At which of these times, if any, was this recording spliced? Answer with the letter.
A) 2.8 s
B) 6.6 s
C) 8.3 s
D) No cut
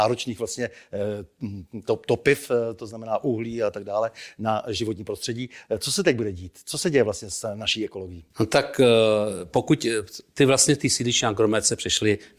C